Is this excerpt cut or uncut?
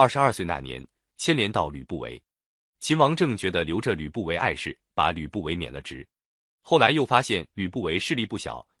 cut